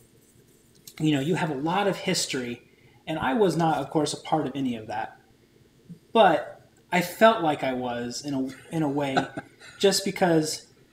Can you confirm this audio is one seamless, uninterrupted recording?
yes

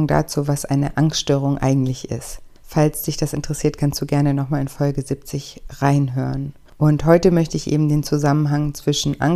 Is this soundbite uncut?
no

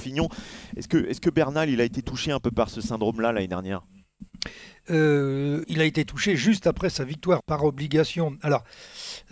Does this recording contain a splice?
yes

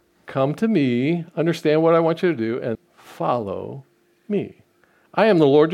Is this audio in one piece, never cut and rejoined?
no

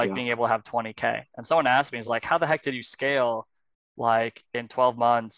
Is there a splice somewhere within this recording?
no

